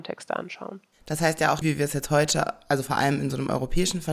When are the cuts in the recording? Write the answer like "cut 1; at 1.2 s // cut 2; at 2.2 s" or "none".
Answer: cut 1; at 1.6 s